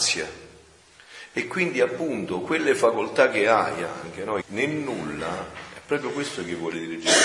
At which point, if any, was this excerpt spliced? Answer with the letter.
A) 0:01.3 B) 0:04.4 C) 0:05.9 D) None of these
B